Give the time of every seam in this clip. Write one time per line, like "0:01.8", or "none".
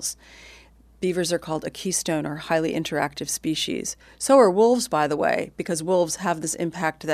none